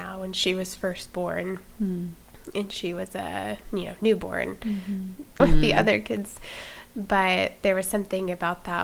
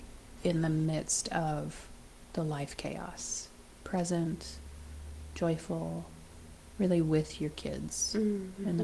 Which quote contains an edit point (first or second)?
first